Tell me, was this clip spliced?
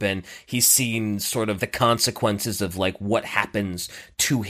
yes; 1 cut; at 1.6 s

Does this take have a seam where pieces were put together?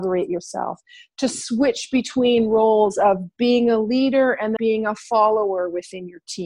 yes; 1 cut; at 4.6 s

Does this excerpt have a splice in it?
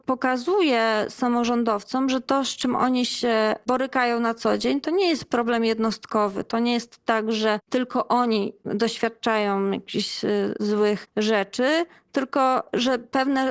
no; 0 cuts

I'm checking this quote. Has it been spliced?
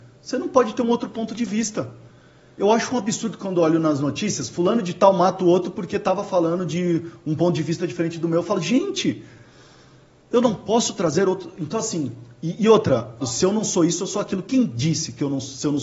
yes; 1 cut; at 13.2 s

